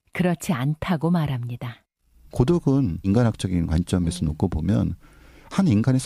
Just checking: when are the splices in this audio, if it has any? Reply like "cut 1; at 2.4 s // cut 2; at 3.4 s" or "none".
cut 1; at 2.3 s